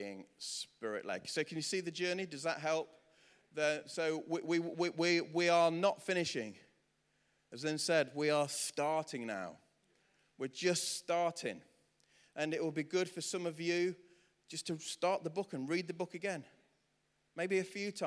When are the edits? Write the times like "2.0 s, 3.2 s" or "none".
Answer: none